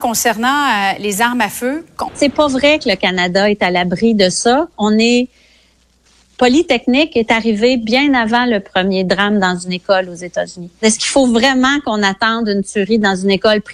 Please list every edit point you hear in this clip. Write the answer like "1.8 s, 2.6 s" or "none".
2.1 s, 4.7 s